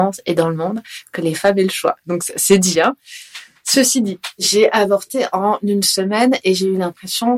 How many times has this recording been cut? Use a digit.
0